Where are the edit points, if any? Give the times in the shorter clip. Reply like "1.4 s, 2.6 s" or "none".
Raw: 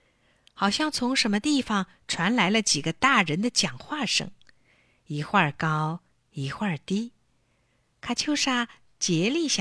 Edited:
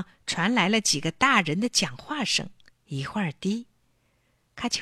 2.7 s